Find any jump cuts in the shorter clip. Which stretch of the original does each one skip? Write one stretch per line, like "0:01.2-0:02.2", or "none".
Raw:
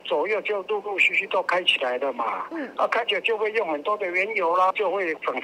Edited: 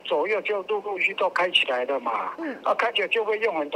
0:01.0-0:01.1